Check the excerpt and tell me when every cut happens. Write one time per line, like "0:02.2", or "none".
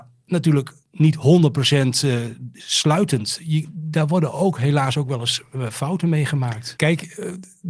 0:06.8